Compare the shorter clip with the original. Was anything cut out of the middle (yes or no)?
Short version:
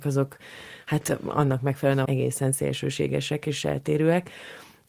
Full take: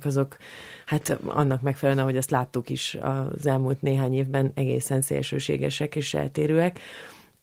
yes